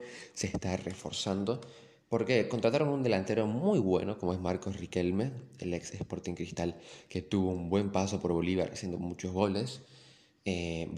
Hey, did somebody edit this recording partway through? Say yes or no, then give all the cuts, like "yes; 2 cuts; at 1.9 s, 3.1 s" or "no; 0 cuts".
no; 0 cuts